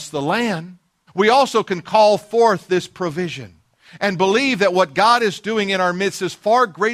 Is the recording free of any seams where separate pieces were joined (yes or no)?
no